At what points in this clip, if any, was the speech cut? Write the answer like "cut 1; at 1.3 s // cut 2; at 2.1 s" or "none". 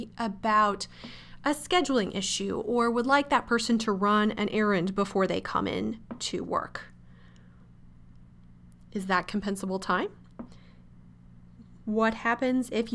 none